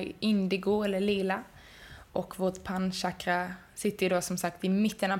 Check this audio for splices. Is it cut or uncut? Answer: uncut